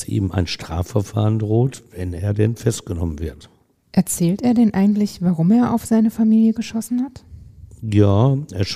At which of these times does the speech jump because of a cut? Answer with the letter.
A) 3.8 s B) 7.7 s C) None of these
C